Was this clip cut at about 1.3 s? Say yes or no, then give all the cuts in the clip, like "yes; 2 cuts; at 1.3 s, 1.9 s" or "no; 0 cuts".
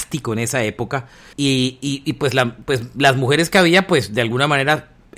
yes; 1 cut; at 1.3 s